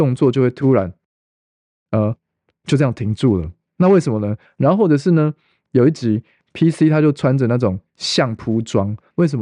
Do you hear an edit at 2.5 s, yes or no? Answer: no